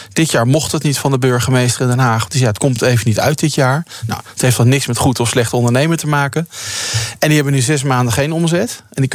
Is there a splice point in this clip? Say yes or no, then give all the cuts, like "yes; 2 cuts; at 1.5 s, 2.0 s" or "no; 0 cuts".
no; 0 cuts